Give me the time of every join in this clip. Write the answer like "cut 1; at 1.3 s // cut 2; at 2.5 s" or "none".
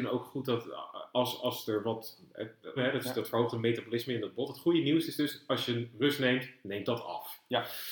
cut 1; at 2.8 s